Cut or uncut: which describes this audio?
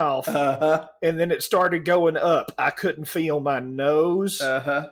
uncut